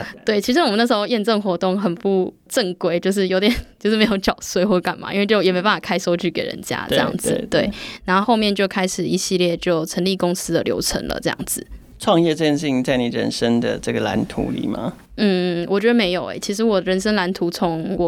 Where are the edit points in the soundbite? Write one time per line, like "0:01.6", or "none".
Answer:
0:08.2